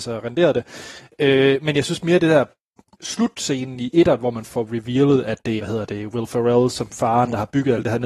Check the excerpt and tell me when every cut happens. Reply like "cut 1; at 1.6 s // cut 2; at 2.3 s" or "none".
cut 1; at 5.6 s

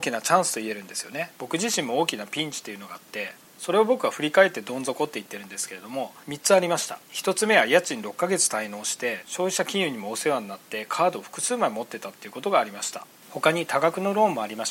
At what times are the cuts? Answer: cut 1; at 1.3 s // cut 2; at 7.0 s

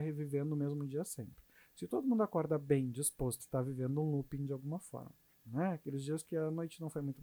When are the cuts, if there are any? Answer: cut 1; at 3.4 s // cut 2; at 5.3 s

